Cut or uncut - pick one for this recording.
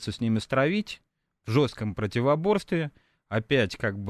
uncut